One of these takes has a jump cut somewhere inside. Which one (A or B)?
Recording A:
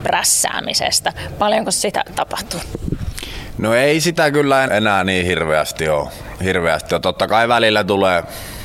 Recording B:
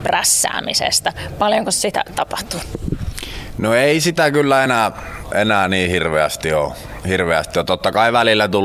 A